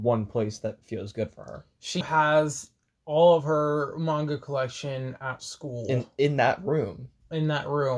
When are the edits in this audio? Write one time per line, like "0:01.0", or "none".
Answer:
0:02.0